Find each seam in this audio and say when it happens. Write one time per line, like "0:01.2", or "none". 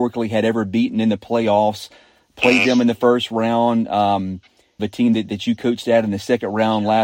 0:04.8